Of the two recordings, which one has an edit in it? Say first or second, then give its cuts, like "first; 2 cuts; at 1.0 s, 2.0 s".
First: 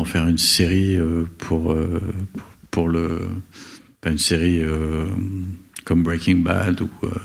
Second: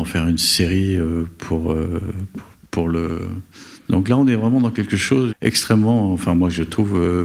second; 2 cuts; at 3.8 s, 5.3 s